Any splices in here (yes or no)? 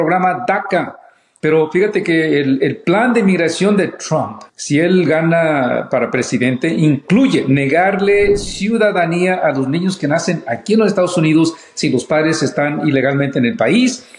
yes